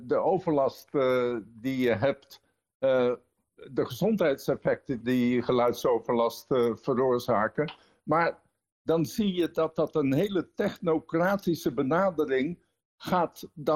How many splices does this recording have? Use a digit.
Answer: 1